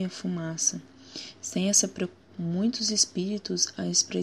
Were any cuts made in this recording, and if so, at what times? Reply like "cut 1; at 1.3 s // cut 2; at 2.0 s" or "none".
cut 1; at 2.3 s